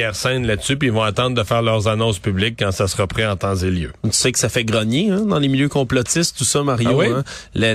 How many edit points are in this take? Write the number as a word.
zero